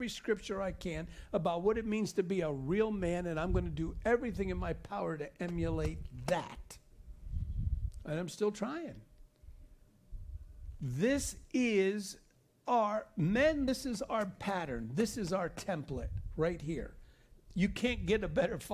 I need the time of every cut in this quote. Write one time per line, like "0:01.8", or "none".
none